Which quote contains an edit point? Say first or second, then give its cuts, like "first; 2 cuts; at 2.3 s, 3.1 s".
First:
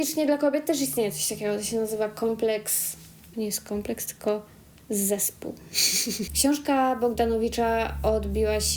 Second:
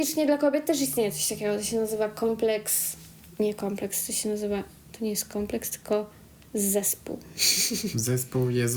first; 2 cuts; at 3.3 s, 6.3 s